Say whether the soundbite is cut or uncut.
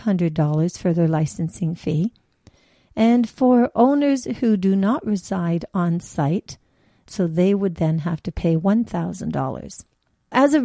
cut